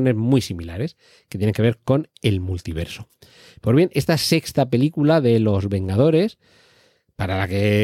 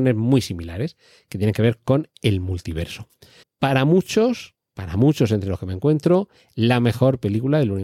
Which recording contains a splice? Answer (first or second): second